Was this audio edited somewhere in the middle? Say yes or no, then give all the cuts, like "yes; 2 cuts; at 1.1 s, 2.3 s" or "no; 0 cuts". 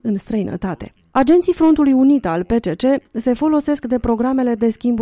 no; 0 cuts